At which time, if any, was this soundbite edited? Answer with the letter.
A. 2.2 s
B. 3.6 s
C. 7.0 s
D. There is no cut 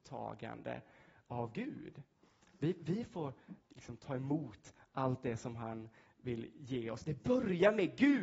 B